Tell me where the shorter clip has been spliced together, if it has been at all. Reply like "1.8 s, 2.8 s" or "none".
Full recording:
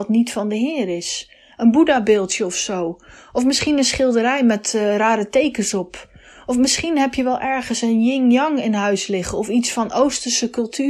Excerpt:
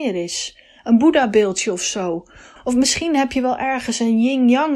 2.6 s